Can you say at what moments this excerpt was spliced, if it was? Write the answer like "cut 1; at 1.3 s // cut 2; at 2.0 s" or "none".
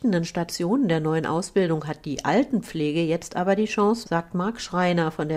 cut 1; at 4.0 s